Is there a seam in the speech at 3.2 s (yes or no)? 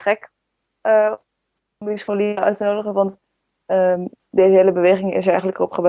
no